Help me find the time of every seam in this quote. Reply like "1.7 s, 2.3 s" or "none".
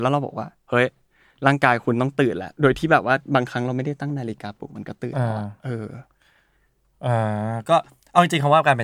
none